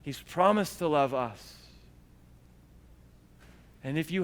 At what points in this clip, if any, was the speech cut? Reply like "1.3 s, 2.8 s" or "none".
none